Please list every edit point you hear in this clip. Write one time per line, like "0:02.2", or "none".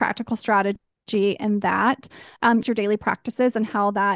0:02.6

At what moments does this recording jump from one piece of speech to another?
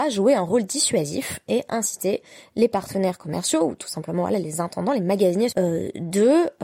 0:05.5

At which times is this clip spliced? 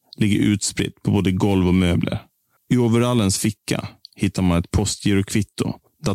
0:02.6

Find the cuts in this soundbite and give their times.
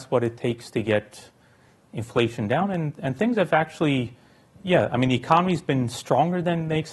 none

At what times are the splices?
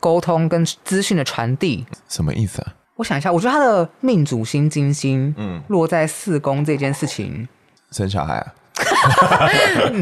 0:02.8

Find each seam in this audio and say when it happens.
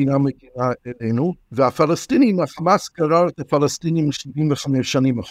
0:01.4

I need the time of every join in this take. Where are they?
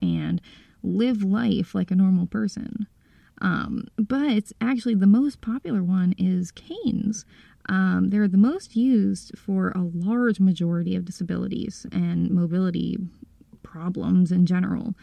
none

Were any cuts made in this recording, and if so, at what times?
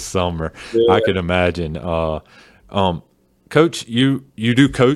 none

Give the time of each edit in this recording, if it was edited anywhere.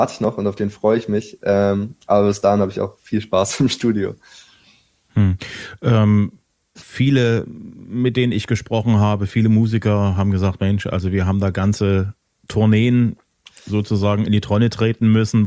0:06.8

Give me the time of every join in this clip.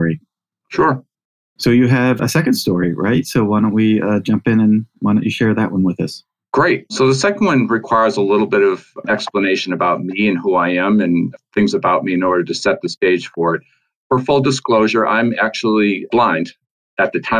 0:02.2

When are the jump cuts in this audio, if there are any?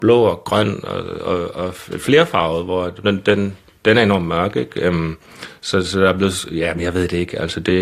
0:03.0

